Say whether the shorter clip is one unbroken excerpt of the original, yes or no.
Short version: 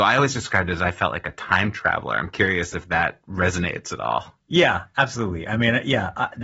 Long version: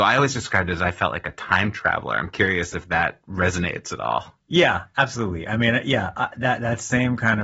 yes